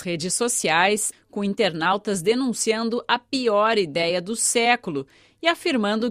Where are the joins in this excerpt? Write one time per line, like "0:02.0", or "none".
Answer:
0:01.1

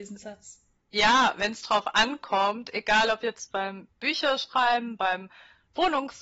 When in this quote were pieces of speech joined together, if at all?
none

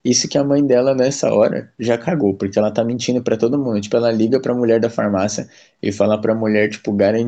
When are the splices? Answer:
none

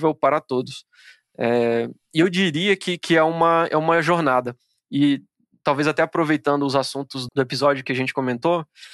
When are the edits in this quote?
0:07.3

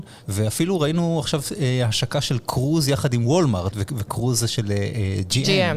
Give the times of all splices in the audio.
0:03.7

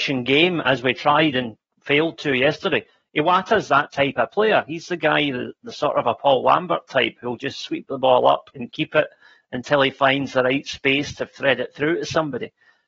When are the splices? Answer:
none

